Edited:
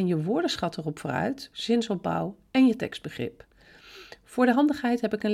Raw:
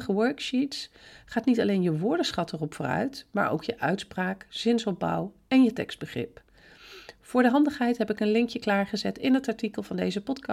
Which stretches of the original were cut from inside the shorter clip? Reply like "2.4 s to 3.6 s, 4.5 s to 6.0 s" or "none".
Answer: 3.3 s to 4.5 s